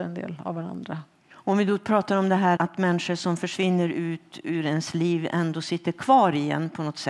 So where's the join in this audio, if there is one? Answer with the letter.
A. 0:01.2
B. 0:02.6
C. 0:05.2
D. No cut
B